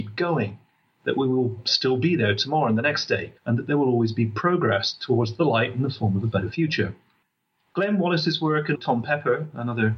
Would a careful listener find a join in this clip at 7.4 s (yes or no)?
no